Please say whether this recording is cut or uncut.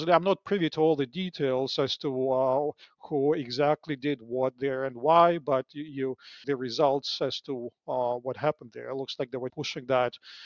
cut